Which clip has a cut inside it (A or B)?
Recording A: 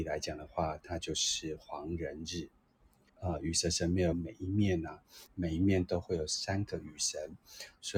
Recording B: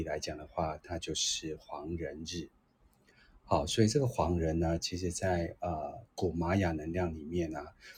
A